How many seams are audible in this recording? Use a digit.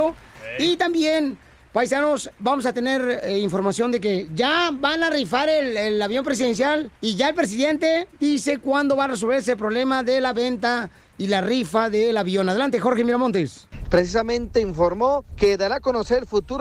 2